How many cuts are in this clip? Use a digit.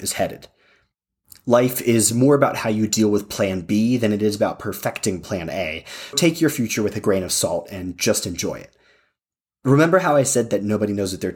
1